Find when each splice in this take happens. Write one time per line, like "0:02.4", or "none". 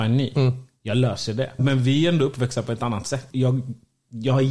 0:01.6
0:03.3

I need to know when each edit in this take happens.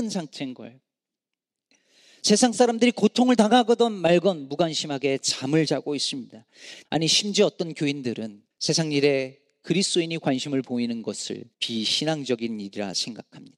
0:06.9
0:08.5
0:11.5

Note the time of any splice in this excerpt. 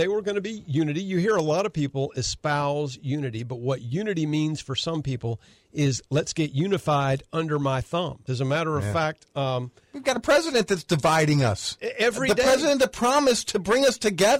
0:08.3

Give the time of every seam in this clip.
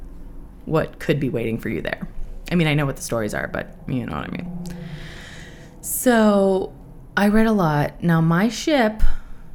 none

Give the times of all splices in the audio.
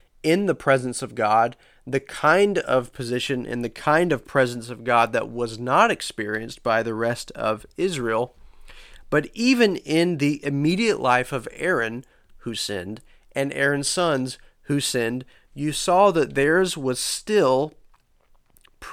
none

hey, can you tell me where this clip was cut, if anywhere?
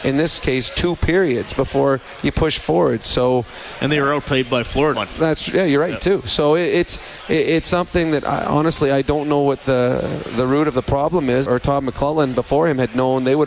0:04.9
0:11.5

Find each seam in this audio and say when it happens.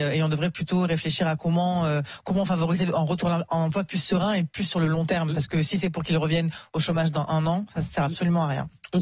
none

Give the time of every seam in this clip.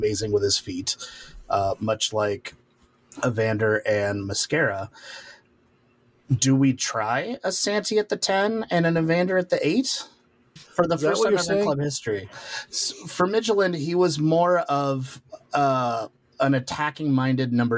0:10.6

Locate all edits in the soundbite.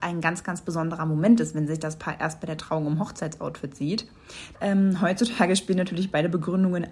0:04.5

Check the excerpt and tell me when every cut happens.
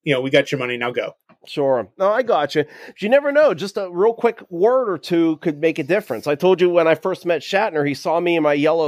none

